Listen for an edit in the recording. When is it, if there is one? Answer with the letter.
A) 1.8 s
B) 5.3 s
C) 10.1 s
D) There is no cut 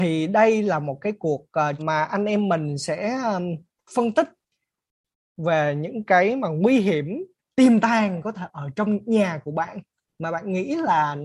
A